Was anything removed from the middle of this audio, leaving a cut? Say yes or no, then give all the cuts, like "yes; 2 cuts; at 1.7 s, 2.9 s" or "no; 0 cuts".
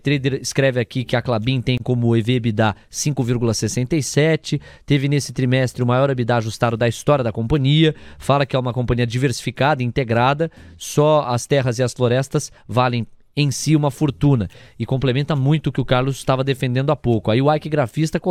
no; 0 cuts